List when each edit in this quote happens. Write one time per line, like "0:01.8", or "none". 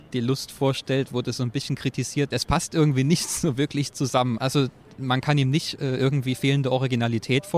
0:02.3
0:04.4